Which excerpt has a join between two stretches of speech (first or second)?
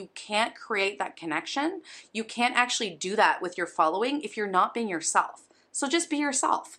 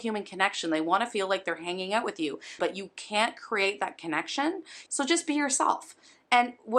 second